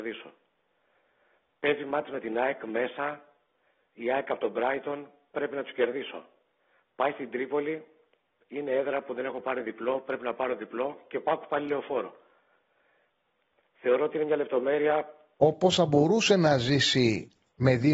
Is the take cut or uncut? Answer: cut